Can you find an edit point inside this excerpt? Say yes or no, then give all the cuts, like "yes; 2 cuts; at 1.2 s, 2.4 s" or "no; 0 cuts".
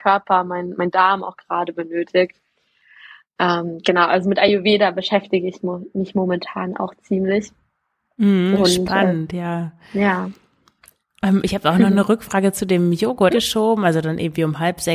yes; 1 cut; at 13.3 s